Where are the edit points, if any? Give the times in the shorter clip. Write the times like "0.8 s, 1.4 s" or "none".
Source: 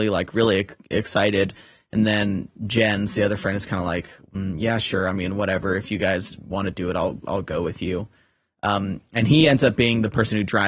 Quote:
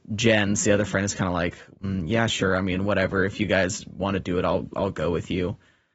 none